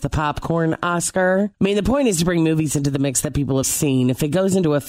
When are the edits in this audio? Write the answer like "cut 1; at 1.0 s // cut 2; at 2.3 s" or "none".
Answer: cut 1; at 1.5 s // cut 2; at 3.6 s